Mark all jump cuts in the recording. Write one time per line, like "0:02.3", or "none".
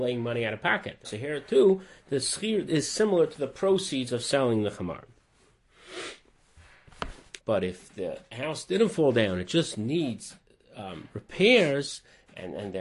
0:01.0
0:02.7
0:07.4